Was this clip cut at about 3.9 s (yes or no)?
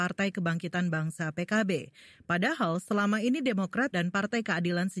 yes